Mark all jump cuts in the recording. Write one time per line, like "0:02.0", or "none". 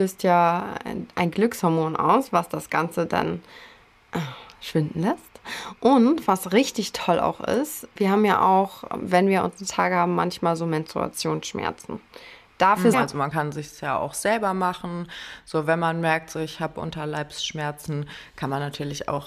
0:12.9